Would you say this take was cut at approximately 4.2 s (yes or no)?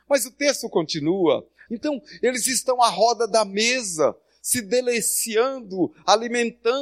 no